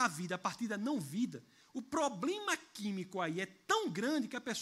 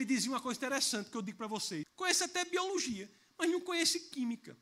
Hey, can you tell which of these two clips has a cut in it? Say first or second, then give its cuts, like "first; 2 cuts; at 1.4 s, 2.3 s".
second; 1 cut; at 1.8 s